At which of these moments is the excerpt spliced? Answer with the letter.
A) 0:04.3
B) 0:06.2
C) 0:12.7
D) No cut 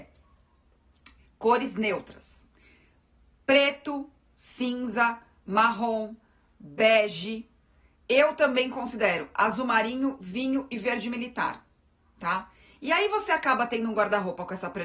A